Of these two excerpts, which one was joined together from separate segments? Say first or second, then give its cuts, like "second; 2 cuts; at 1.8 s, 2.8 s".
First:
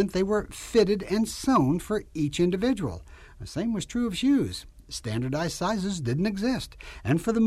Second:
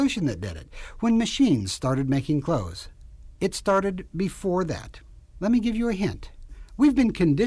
second; 2 cuts; at 3.3 s, 5.4 s